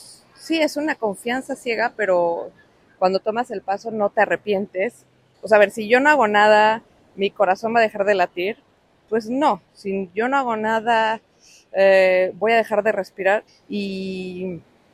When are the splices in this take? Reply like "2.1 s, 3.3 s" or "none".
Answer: 5.3 s, 13.5 s